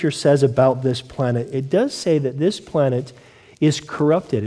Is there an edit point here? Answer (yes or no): no